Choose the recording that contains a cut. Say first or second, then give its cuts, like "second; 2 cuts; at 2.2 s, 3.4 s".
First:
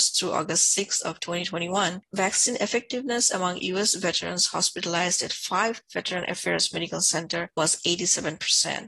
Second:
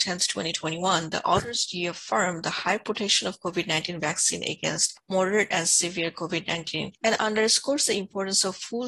second; 1 cut; at 7.0 s